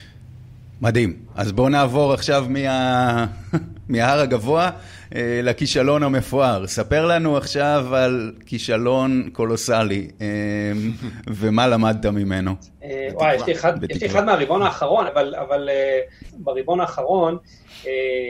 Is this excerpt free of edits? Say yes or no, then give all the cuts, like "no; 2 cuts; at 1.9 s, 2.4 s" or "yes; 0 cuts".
no; 2 cuts; at 15.1 s, 16.3 s